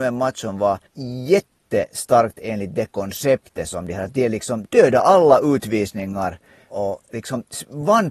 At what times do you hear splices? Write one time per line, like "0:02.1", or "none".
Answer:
0:04.6